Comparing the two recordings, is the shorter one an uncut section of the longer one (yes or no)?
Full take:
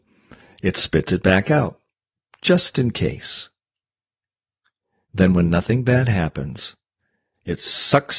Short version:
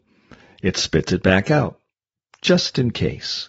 yes